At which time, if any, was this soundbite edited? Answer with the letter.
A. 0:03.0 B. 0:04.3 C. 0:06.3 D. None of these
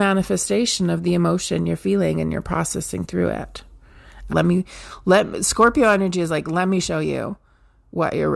B